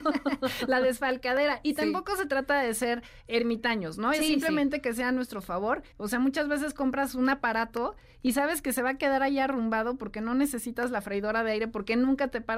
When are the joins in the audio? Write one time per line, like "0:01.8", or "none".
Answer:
0:05.9